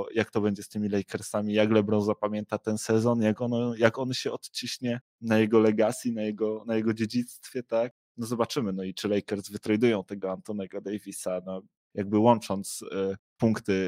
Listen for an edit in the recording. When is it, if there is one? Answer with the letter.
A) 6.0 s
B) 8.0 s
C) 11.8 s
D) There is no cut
C